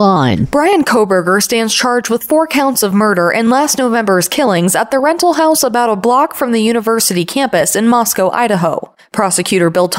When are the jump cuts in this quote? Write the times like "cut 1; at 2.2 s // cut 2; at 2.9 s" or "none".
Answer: cut 1; at 9.0 s